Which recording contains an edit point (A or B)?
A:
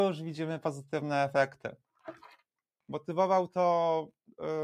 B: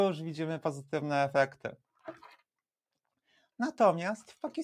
A